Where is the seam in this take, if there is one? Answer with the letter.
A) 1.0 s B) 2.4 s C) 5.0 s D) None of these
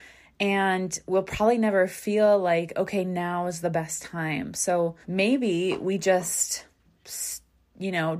C